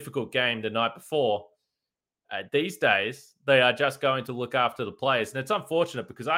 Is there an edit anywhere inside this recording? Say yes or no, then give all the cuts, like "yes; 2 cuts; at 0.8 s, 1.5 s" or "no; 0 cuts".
no; 0 cuts